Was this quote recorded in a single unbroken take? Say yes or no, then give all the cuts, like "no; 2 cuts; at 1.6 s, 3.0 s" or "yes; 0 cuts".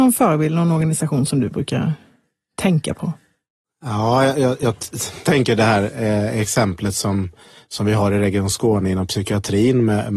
yes; 0 cuts